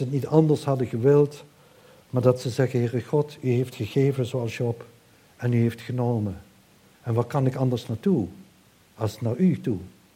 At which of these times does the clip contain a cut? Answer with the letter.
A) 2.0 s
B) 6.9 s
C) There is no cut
C